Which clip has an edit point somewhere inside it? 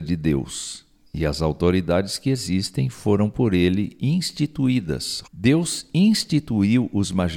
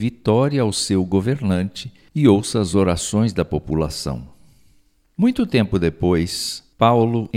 first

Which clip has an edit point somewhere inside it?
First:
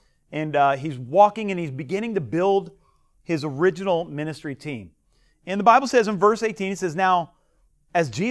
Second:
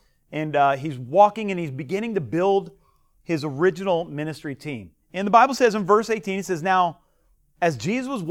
second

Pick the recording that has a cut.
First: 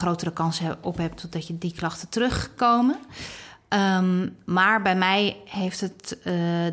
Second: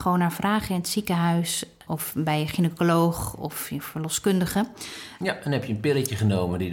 second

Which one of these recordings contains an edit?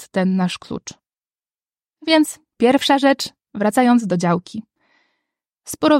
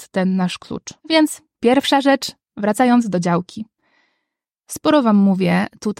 second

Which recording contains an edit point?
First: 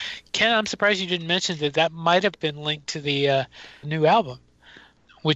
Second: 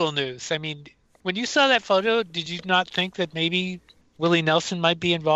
first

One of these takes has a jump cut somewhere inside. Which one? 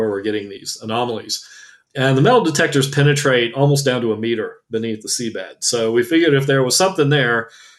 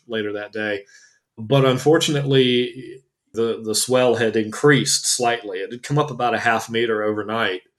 second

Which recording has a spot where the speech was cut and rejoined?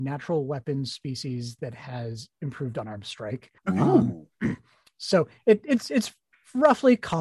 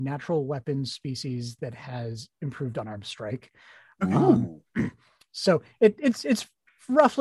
first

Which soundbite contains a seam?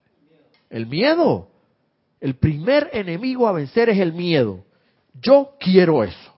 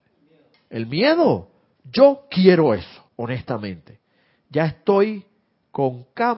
second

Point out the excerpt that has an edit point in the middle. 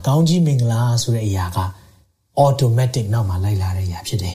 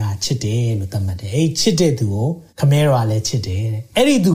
second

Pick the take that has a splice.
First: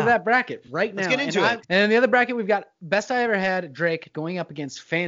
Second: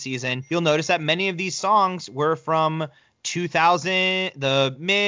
first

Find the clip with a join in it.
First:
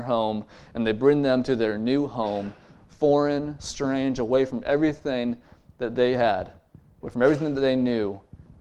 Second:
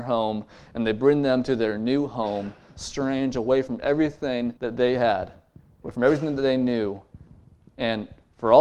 second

